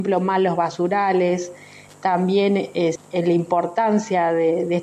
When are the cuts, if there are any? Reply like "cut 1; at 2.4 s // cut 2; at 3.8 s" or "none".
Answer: cut 1; at 3.0 s

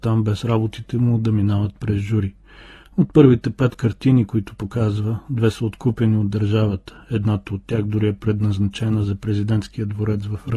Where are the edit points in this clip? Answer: none

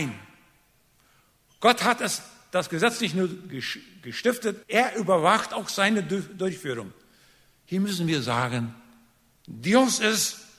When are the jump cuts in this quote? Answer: cut 1; at 4.6 s

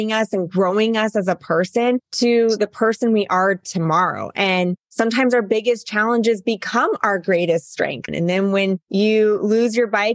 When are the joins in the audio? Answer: cut 1; at 8.1 s

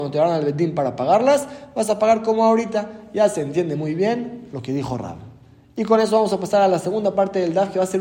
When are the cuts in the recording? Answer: none

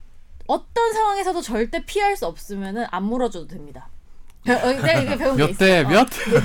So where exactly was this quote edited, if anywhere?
cut 1; at 4.5 s

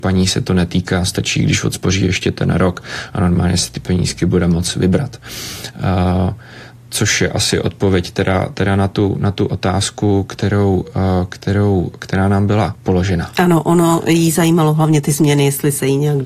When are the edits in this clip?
cut 1; at 12.8 s

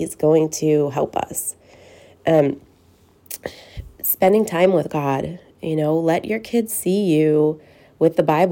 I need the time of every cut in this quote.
none

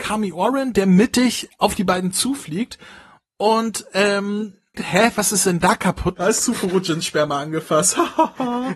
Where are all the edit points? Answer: cut 1; at 4.7 s // cut 2; at 6.2 s

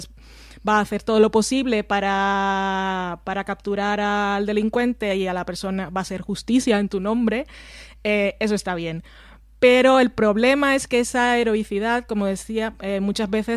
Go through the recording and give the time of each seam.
none

